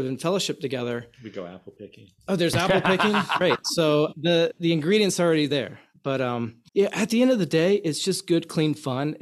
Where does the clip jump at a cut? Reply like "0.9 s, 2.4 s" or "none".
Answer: 4.1 s, 6.7 s